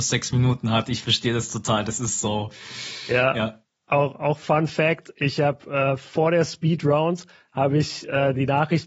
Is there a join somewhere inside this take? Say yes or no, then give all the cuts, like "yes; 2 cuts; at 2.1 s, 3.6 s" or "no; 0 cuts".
no; 0 cuts